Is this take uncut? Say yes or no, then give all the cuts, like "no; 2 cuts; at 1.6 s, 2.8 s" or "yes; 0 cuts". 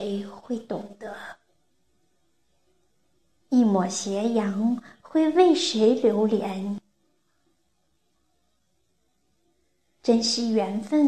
yes; 0 cuts